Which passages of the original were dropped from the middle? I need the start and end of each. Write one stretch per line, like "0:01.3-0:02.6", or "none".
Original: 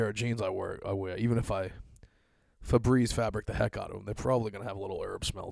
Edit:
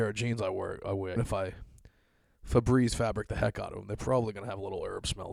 0:01.2-0:01.3